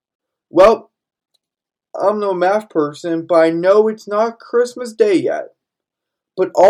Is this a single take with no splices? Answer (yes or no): yes